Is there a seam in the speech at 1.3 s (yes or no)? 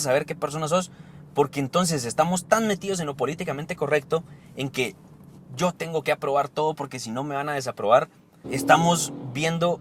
no